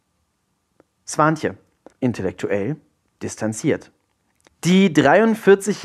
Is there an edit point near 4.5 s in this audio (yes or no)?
yes